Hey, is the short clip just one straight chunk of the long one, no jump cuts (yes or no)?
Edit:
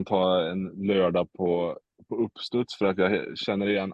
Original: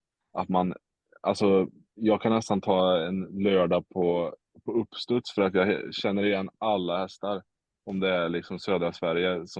yes